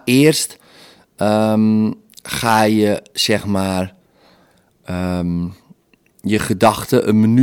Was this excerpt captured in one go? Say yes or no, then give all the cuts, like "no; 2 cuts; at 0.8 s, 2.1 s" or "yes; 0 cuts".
yes; 0 cuts